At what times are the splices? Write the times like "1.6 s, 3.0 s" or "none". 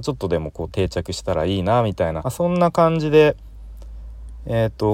2.2 s